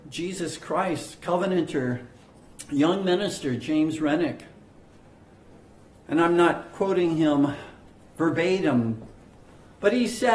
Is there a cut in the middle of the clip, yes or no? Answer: no